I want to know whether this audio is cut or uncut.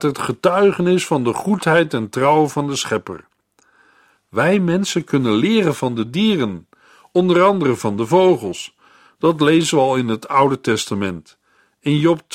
uncut